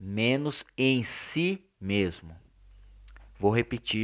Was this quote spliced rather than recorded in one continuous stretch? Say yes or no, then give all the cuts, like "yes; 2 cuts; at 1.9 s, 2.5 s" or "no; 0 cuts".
no; 0 cuts